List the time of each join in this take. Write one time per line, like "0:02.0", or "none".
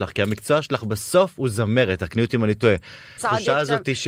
0:03.2